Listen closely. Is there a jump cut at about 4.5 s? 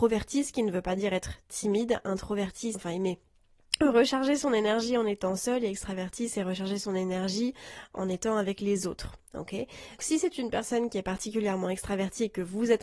no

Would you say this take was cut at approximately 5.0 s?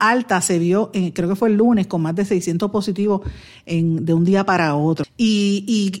yes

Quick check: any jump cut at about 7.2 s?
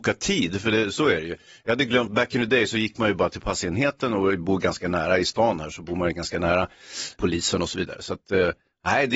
yes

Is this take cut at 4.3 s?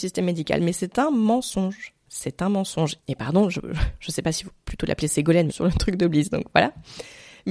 no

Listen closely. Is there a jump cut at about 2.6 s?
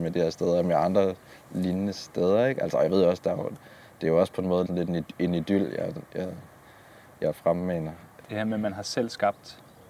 no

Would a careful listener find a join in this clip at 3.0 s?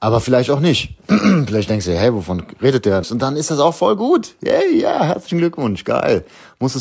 yes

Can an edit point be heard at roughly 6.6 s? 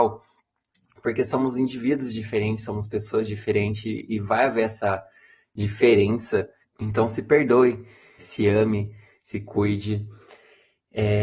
yes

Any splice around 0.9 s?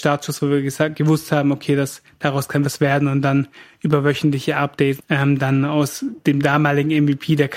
no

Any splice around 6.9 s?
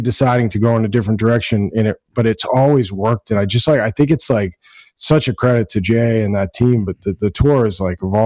no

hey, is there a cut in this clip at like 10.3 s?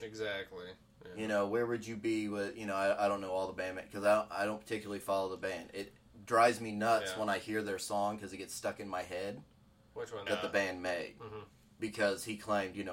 yes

